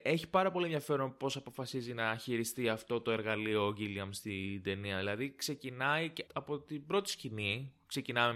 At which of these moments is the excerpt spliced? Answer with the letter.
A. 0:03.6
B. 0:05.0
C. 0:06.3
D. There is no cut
C